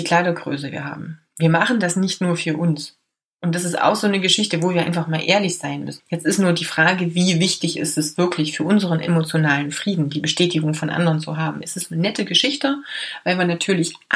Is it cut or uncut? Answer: cut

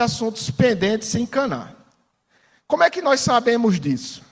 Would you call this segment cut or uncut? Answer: uncut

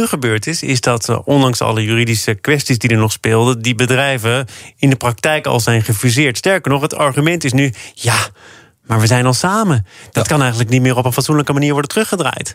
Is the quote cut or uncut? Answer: uncut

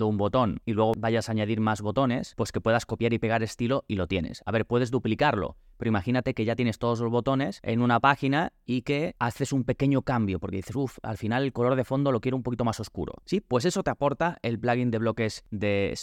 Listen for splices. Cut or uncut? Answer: cut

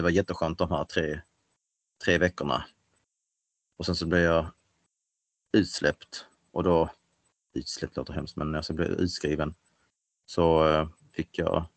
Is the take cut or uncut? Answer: uncut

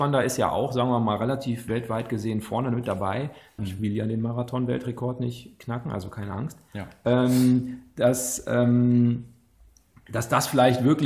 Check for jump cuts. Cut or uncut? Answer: cut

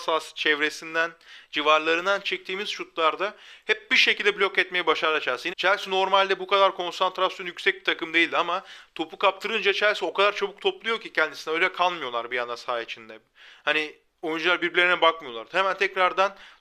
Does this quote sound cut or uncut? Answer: cut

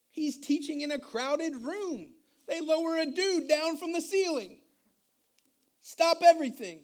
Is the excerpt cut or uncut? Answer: uncut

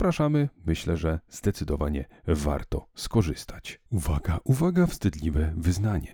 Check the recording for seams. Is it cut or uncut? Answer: cut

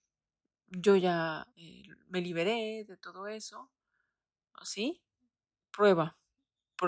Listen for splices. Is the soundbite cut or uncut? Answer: uncut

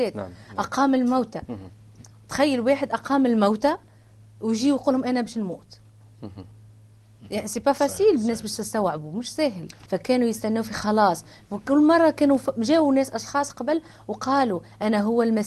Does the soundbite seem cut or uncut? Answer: cut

